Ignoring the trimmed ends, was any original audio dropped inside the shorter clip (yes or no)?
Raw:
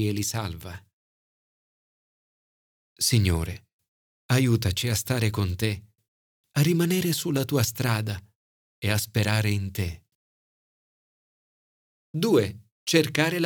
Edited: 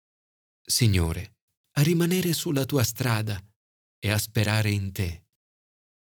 yes